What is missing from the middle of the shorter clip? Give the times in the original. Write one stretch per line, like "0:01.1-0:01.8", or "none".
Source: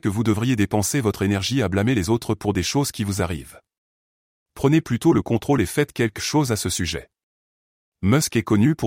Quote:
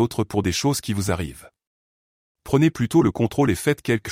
none

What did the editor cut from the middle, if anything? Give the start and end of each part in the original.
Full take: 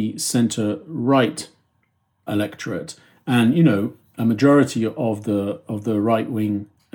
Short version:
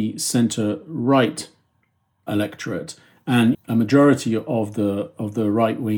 0:03.5-0:04.0

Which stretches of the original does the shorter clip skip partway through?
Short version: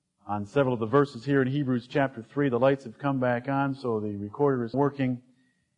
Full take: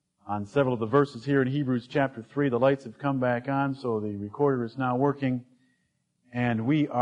0:04.7-0:05.0

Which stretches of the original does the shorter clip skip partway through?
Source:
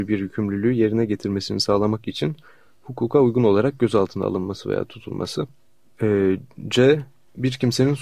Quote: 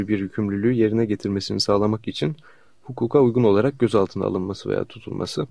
none

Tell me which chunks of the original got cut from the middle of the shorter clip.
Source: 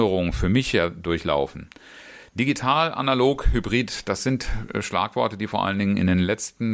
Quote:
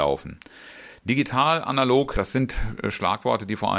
0:03.4-0:04.0

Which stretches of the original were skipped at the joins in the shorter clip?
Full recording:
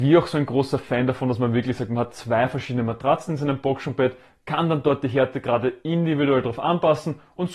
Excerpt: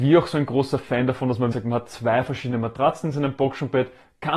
0:01.5-0:01.8

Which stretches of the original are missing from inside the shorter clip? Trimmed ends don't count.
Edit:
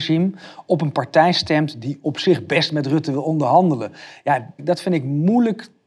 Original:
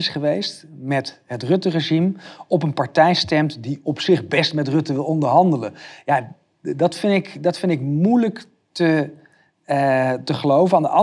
0:06.4-0:07.4

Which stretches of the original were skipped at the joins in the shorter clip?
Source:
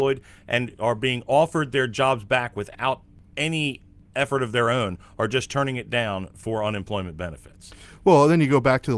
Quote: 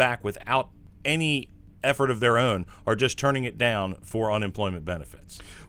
none

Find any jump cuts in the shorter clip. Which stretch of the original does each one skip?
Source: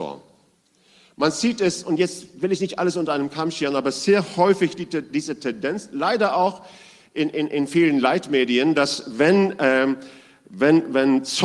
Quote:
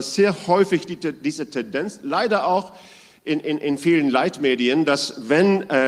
none

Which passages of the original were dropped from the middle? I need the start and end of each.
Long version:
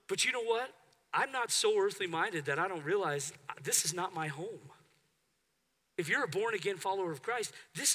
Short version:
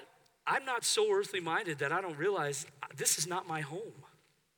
none

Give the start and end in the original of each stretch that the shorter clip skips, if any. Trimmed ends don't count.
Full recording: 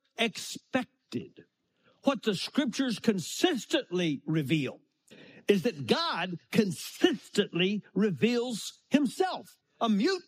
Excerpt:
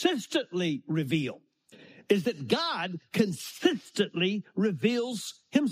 none

